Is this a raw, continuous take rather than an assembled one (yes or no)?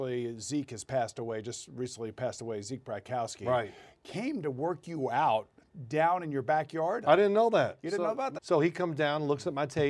no